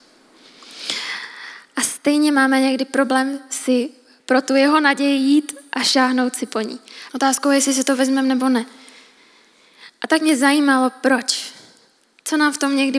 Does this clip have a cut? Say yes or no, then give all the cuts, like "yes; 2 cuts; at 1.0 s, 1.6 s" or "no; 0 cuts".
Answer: yes; 1 cut; at 7.1 s